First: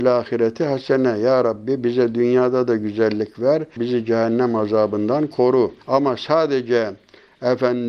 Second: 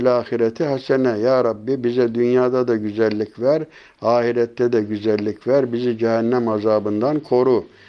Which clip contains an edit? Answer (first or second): first